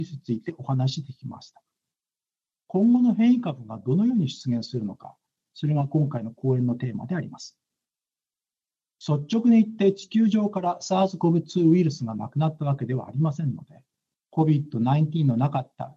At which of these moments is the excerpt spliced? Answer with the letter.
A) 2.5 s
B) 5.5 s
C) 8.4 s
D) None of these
B